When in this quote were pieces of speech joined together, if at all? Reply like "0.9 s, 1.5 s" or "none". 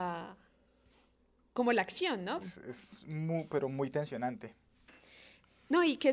2.4 s